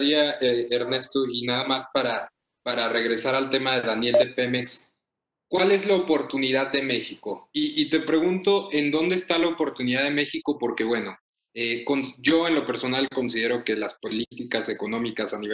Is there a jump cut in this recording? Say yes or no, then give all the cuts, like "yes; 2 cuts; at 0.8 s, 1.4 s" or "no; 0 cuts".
no; 0 cuts